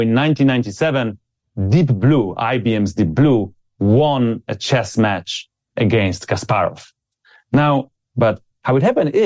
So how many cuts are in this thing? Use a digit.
1